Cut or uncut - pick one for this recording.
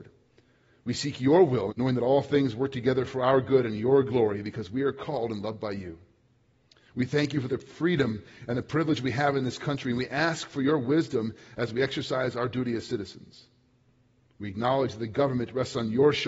cut